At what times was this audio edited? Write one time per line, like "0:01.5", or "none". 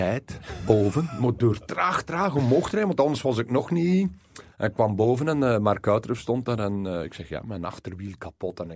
none